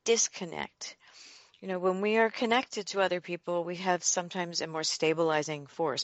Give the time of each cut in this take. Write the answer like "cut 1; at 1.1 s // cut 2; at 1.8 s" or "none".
none